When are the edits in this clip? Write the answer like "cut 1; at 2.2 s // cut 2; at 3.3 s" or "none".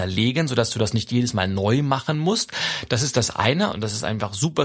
cut 1; at 3.7 s